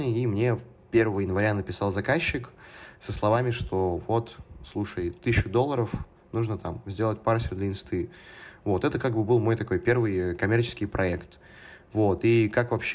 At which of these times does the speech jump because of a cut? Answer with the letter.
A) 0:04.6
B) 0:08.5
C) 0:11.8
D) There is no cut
D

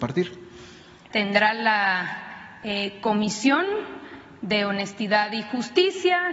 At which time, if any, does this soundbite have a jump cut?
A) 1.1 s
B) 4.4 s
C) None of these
A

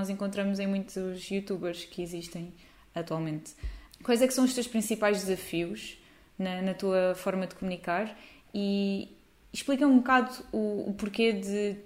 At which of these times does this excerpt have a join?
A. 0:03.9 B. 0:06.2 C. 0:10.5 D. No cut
A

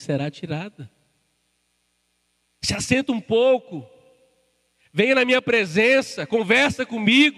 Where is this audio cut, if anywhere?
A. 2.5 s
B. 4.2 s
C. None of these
A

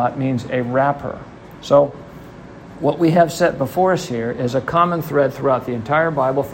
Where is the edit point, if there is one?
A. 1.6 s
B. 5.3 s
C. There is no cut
A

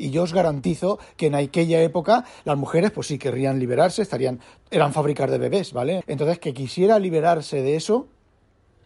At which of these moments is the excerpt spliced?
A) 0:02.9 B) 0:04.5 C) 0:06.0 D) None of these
C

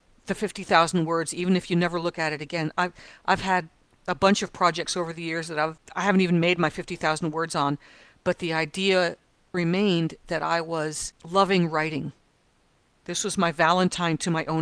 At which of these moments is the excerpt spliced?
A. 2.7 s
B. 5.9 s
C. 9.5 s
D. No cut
C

